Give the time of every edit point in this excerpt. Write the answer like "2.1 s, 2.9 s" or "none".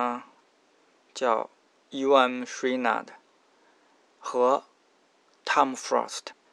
none